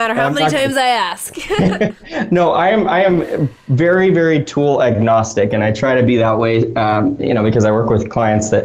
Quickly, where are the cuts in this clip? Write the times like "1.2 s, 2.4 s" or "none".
none